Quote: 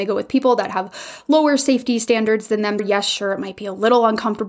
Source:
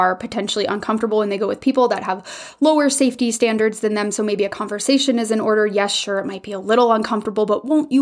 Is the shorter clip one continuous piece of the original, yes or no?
no